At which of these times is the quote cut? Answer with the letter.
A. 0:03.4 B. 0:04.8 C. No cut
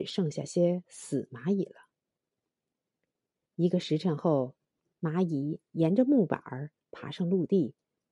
B